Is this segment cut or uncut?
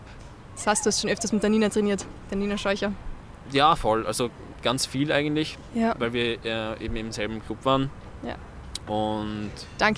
uncut